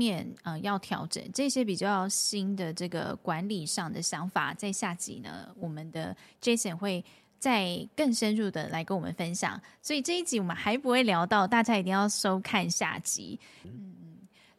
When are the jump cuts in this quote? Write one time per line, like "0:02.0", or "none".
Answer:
0:13.6